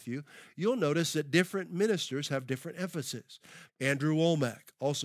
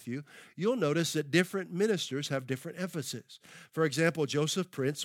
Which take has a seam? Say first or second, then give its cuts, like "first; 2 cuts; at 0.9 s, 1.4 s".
first; 1 cut; at 3.7 s